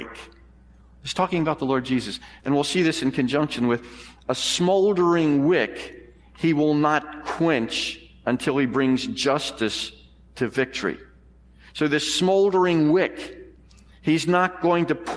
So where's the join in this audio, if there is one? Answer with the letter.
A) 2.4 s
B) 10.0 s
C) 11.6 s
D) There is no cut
A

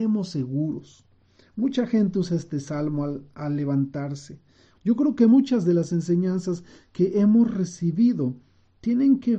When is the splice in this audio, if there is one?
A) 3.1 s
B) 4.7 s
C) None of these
B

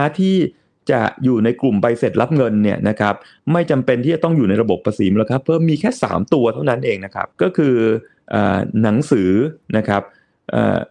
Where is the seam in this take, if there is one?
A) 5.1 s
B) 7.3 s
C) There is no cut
B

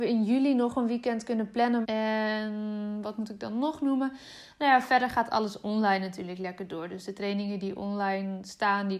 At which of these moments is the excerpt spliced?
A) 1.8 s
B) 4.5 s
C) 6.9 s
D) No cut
A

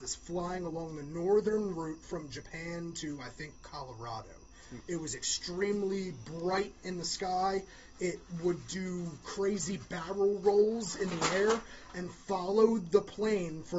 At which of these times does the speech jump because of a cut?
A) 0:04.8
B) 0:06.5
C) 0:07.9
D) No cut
A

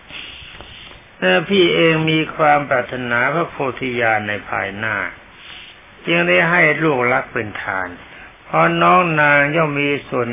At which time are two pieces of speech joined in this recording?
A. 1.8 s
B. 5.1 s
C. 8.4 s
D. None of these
C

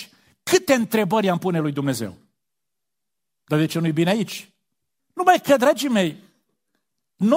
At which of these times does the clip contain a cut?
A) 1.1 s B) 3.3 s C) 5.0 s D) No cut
C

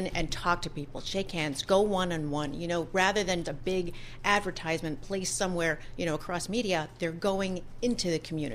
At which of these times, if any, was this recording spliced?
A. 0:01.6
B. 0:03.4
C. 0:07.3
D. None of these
B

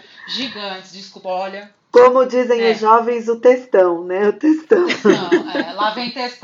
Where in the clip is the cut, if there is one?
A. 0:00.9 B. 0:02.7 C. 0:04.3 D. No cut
D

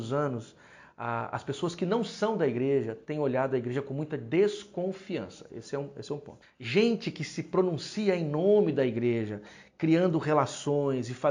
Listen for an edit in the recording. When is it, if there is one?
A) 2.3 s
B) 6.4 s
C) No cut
B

